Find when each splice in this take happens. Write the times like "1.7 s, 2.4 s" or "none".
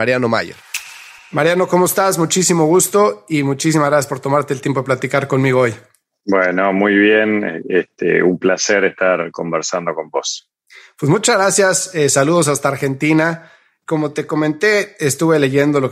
none